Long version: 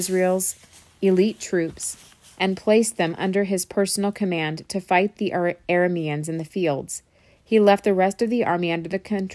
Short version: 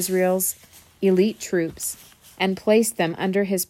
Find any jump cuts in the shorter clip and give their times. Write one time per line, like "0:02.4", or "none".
none